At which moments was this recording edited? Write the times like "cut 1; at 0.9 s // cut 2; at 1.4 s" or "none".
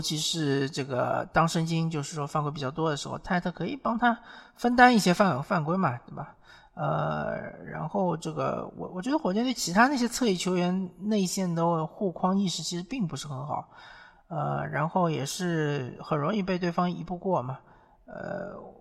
none